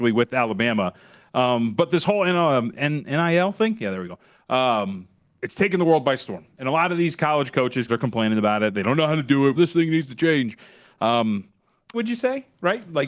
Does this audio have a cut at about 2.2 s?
no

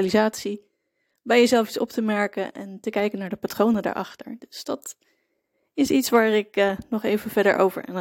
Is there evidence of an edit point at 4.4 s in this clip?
no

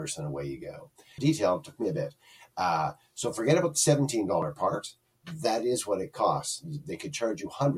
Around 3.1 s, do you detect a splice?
no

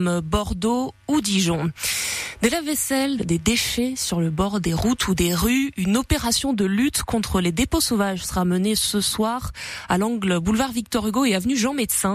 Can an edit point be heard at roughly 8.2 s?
no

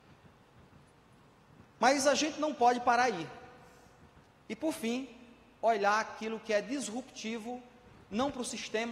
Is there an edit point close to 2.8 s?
no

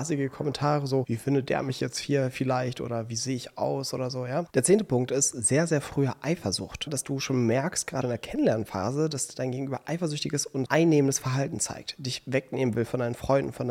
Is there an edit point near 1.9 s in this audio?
no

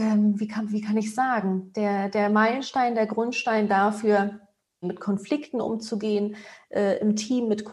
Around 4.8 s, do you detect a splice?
yes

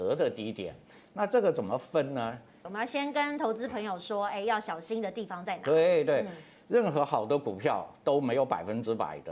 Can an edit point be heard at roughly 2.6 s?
yes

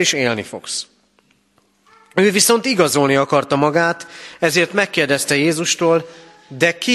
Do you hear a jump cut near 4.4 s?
no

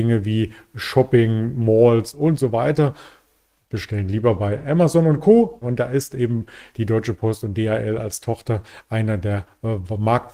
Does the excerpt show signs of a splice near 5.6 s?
yes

